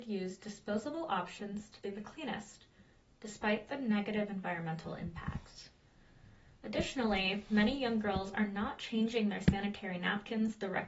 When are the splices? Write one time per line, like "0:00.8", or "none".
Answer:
none